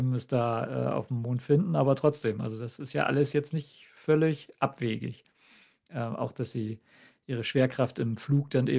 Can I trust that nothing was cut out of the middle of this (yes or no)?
yes